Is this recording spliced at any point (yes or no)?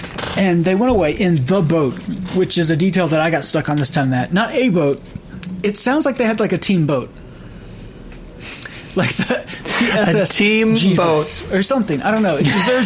no